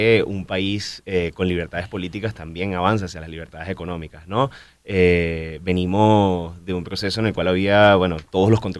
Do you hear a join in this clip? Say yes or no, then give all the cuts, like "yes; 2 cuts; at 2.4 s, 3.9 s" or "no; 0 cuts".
no; 0 cuts